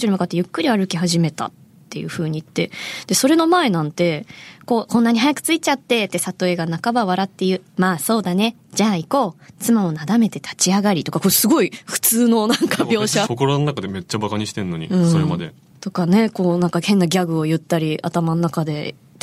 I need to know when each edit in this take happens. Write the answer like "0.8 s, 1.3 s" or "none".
13.2 s